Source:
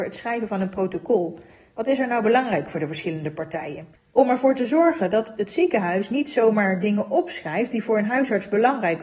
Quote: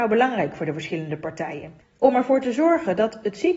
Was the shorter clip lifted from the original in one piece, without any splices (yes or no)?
yes